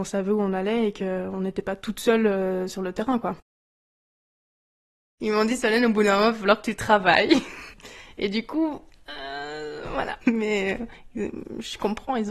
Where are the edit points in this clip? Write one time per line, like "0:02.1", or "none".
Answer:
0:07.7
0:10.2

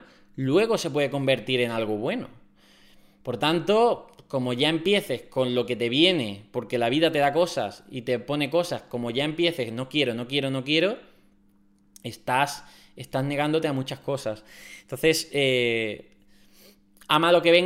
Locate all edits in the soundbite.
none

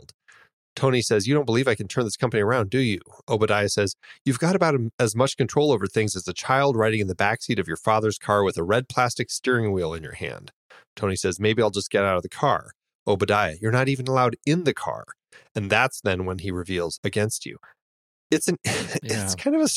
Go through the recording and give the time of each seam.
0:17.0

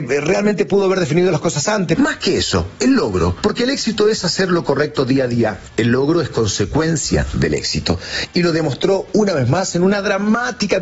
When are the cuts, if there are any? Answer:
0:01.9

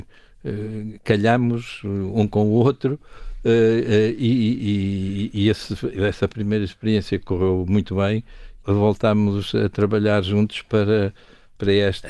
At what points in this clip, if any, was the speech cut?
0:08.6

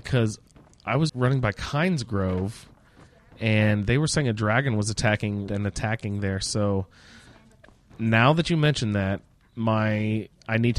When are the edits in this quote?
0:01.1
0:05.5

